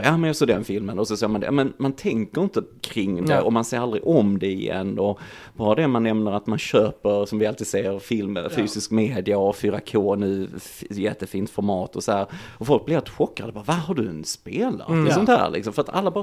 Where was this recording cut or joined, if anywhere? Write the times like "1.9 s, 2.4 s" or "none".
none